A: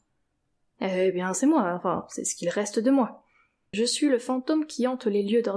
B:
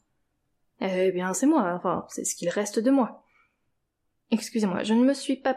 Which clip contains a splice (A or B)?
A